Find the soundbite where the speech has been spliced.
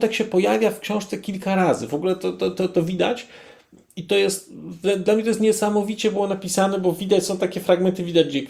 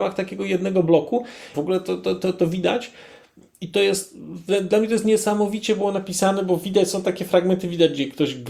second; 1 cut; at 1.5 s

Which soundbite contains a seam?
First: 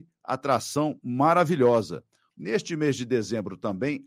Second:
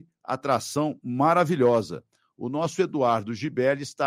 first; 1 cut; at 2.3 s

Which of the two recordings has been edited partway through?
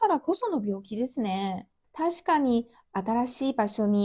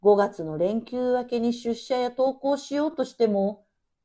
first; 1 cut; at 1.8 s

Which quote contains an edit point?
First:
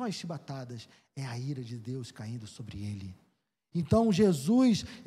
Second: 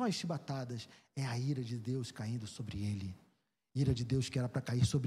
first; 1 cut; at 3.7 s

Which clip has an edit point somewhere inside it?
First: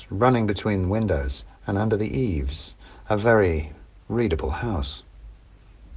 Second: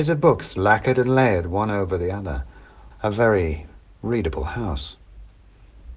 second; 1 cut; at 2.9 s

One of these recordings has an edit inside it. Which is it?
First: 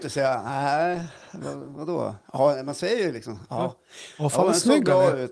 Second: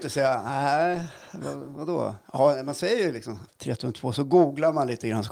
second; 1 cut; at 3.5 s

